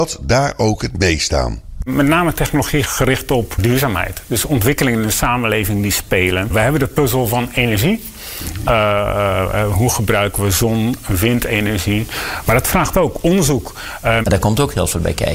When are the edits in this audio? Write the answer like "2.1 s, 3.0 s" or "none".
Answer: 12.4 s, 14.2 s